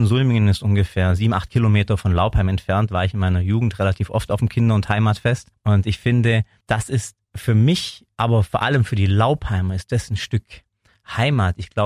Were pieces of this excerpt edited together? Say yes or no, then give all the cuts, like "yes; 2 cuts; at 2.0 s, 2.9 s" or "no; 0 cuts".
no; 0 cuts